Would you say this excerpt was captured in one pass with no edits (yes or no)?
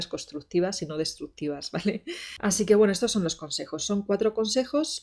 yes